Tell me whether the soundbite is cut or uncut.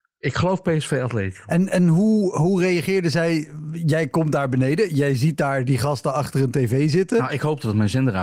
uncut